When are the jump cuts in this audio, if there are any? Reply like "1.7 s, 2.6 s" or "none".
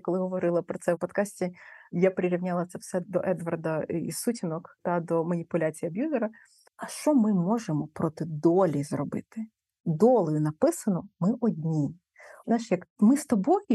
6.7 s